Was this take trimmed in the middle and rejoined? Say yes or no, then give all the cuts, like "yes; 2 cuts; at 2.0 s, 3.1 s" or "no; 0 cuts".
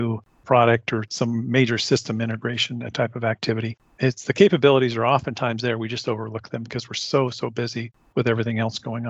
no; 0 cuts